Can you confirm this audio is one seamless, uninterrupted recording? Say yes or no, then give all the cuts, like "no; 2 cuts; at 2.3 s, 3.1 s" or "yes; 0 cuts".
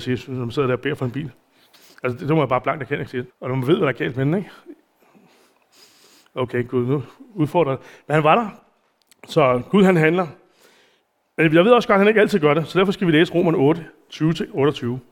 no; 1 cut; at 3.3 s